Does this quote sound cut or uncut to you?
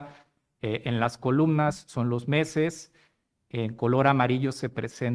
uncut